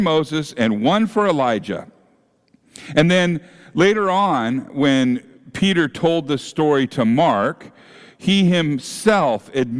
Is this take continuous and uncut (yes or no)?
yes